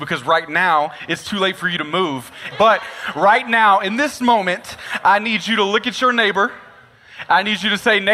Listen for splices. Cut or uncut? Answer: cut